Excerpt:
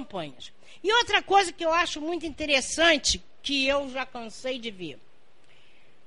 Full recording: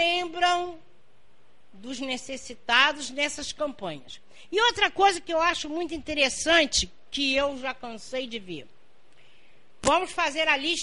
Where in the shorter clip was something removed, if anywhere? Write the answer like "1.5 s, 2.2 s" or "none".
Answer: none